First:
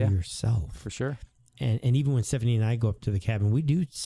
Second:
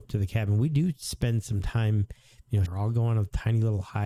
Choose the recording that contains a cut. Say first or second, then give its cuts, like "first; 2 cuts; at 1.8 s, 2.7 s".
second; 1 cut; at 2.7 s